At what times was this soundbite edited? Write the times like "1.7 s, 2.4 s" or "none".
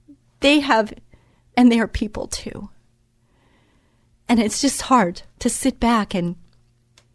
1.5 s, 5.3 s